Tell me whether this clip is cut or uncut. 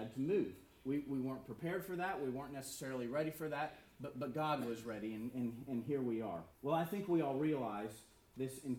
cut